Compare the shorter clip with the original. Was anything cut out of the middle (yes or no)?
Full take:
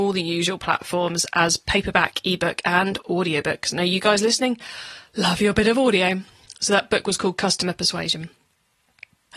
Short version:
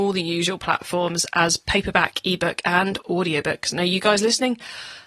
no